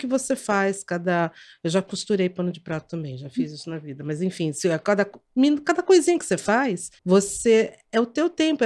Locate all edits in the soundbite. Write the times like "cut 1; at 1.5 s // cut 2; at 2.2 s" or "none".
cut 1; at 7.0 s